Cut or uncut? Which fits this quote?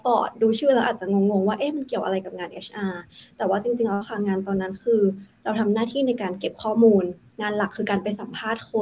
uncut